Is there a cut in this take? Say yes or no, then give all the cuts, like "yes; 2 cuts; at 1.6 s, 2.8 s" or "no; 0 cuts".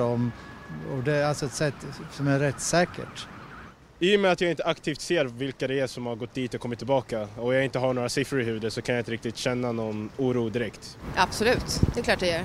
no; 0 cuts